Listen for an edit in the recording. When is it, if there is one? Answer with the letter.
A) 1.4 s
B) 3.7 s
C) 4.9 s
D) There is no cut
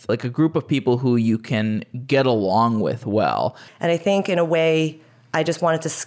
B